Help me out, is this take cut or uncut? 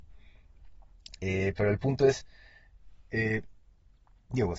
uncut